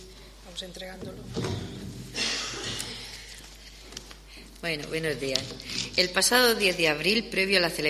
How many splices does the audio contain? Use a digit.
0